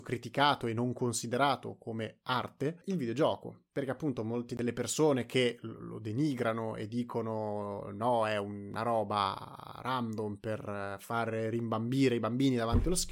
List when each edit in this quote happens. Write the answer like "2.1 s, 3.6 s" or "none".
none

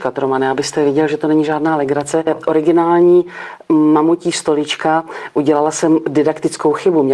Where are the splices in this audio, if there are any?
2.3 s

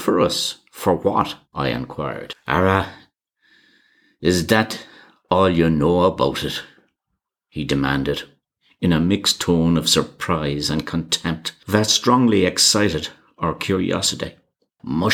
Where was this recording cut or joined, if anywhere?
1.4 s

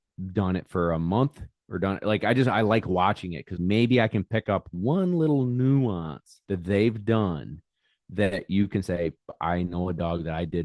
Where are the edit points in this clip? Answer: 3.6 s, 6.4 s

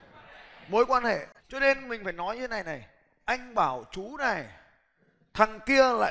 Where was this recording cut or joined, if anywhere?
1.4 s

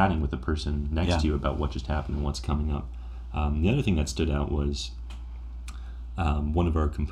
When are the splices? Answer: none

